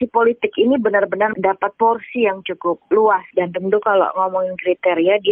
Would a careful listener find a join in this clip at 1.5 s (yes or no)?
no